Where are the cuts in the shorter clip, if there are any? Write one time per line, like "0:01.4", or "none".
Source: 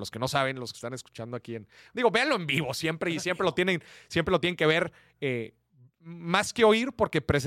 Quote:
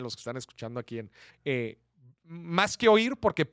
0:01.3